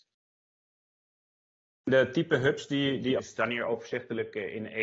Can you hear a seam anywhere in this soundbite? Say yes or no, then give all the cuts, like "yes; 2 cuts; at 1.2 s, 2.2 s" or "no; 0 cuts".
yes; 1 cut; at 3.2 s